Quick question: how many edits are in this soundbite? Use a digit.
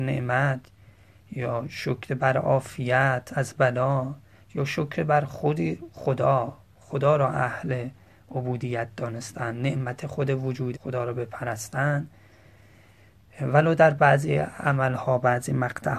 1